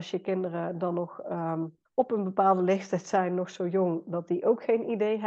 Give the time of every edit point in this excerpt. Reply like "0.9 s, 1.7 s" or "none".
1.9 s

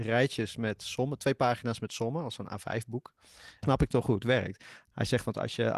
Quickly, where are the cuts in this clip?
3.6 s, 4.8 s

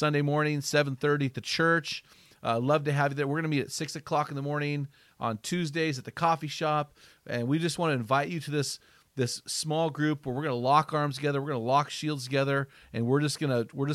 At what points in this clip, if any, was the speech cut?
none

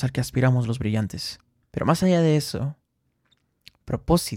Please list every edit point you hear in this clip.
1.6 s

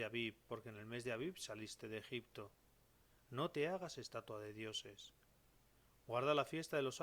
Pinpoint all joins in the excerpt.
3.1 s

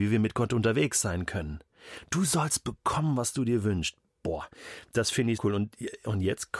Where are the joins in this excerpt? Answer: 5.4 s

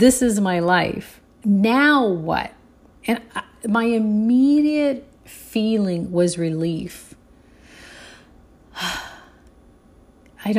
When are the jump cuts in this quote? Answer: none

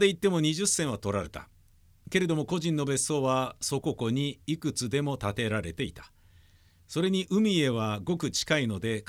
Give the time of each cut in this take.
3.8 s

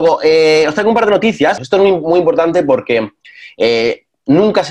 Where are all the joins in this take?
1.6 s

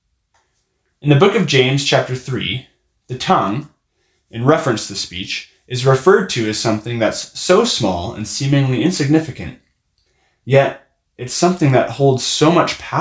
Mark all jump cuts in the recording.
none

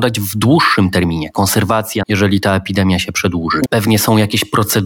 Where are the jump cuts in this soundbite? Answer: 2.0 s, 3.7 s

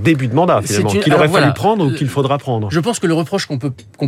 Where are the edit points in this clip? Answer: none

